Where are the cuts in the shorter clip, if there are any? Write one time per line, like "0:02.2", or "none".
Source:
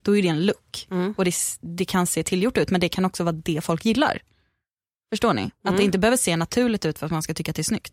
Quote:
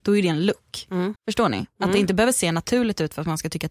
0:01.2